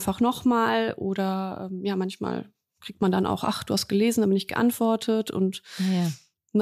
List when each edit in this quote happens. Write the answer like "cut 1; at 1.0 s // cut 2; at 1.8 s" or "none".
none